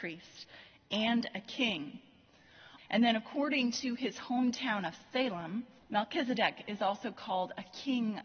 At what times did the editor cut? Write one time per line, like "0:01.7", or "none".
0:02.8
0:05.8